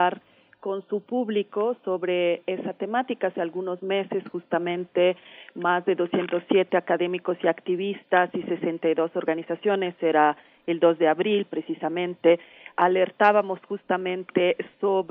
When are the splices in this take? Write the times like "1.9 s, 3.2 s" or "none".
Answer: none